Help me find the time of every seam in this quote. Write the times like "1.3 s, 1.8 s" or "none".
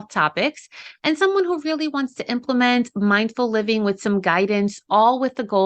none